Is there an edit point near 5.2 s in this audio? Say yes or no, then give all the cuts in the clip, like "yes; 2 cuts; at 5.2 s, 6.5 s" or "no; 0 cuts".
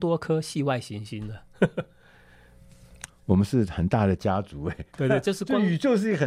no; 1 cut; at 3.1 s